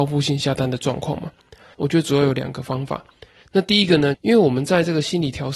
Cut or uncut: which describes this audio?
cut